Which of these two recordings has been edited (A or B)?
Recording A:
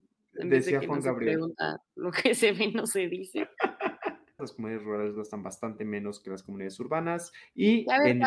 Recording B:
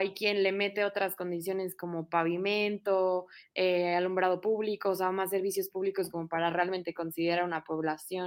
A